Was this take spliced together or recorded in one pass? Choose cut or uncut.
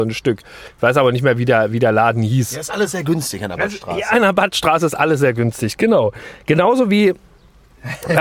uncut